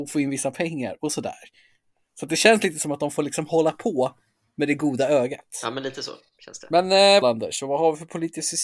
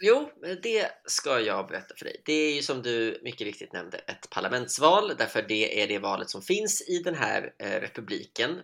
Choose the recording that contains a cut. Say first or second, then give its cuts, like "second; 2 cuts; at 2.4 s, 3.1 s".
first; 1 cut; at 7.2 s